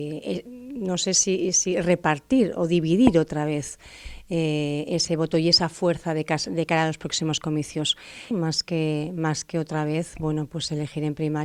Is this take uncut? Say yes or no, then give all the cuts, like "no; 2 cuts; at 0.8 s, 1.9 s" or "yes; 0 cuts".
no; 1 cut; at 8.3 s